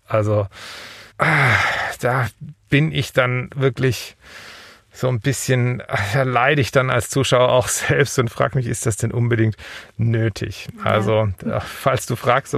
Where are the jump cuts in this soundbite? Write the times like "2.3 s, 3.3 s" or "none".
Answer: 1.1 s